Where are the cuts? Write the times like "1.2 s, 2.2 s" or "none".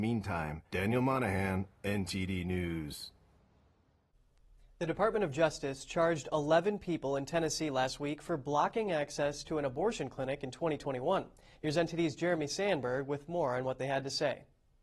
11.5 s